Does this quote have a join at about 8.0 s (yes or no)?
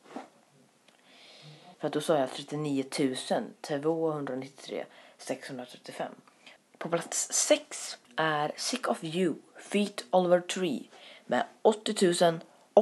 yes